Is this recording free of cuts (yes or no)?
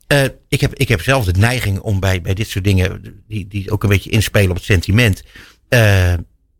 yes